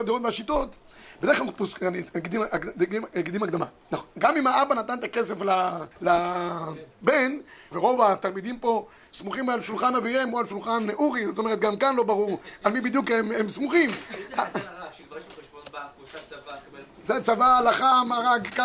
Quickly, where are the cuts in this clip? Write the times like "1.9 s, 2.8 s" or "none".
5.9 s, 7.7 s

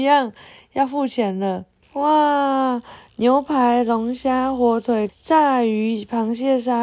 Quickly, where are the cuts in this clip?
1.8 s, 5.1 s

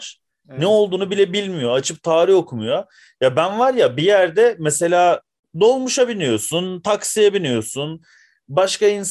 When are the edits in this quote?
none

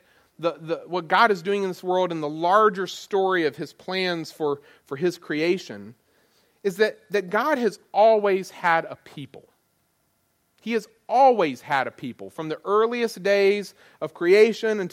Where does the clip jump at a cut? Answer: none

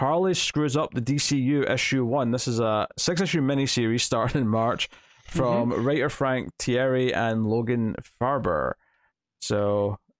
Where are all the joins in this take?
none

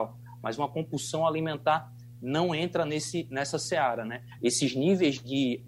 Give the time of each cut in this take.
4.4 s

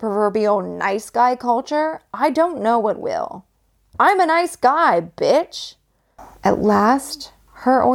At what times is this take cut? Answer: 6.2 s

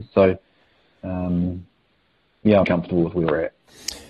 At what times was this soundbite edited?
2.6 s

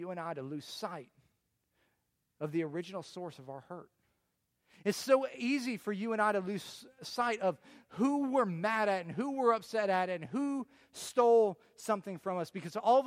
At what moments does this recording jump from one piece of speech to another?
none

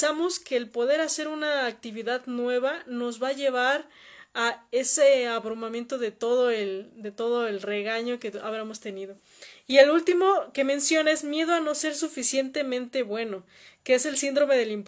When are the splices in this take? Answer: none

